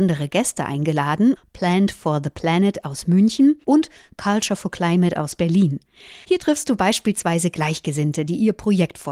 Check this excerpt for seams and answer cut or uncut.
cut